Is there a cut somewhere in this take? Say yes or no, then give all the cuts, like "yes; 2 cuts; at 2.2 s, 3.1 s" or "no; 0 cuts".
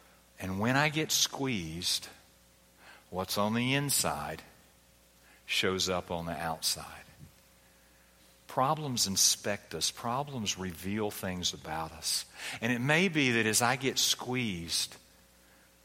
no; 0 cuts